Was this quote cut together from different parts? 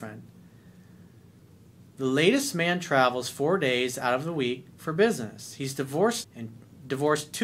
yes; 1 cut; at 6.2 s

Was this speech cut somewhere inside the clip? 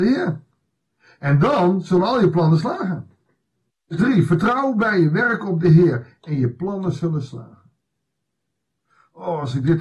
yes; 1 cut; at 3.7 s

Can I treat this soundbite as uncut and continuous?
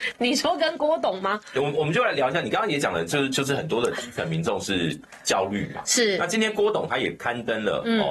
yes; 0 cuts

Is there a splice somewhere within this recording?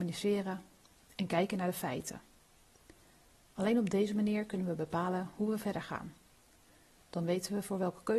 no; 0 cuts

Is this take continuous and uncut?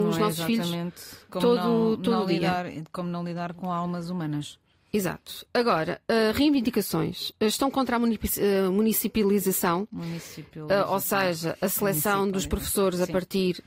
yes; 0 cuts

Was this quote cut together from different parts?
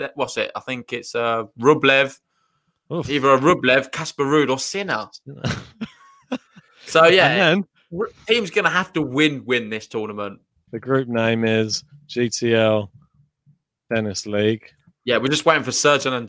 yes; 1 cut; at 10.7 s

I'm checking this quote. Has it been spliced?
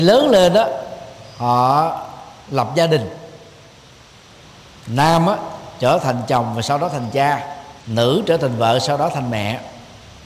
yes; 1 cut; at 7.8 s

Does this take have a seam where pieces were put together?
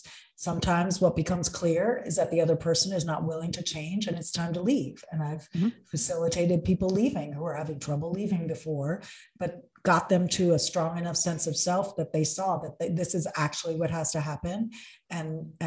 no; 0 cuts

